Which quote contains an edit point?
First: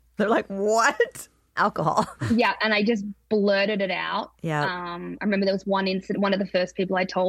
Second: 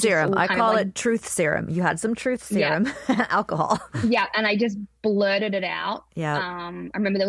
first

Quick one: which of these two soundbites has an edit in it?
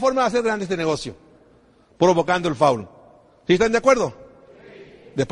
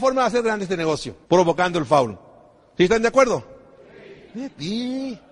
second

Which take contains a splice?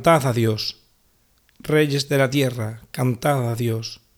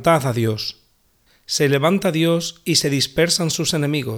second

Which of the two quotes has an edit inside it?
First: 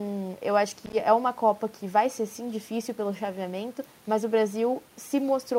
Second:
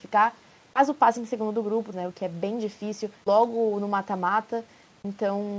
second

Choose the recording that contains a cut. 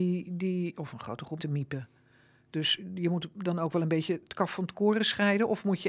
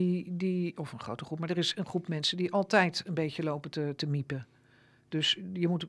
first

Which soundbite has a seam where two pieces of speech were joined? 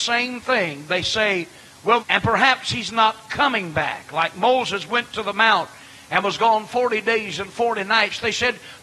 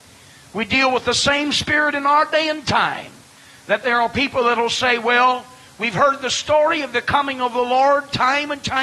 first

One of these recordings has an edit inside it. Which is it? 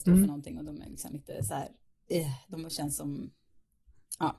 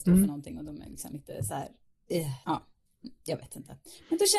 second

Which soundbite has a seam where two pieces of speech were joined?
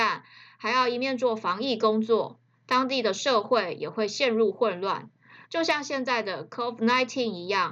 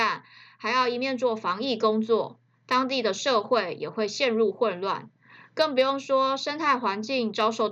first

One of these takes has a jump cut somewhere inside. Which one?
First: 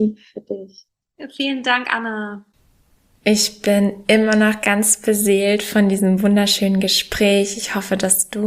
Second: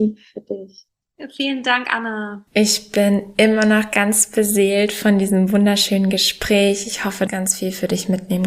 second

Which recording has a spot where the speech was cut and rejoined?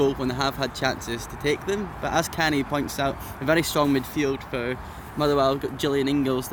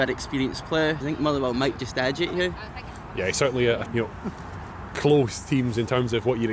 second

